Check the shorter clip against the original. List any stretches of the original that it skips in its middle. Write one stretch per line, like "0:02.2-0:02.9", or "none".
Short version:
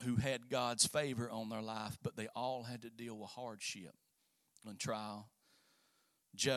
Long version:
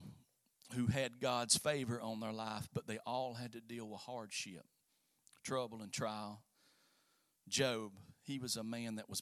0:05.3-0:05.8